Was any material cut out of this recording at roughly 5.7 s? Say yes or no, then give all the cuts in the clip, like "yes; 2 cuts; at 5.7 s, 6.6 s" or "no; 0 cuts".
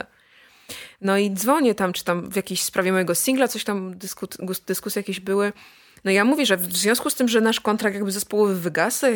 no; 0 cuts